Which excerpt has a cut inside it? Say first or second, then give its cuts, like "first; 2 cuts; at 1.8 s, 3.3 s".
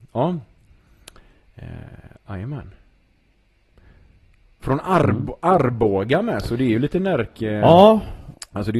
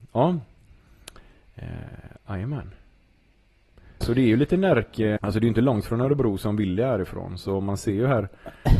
second; 2 cuts; at 4.0 s, 5.2 s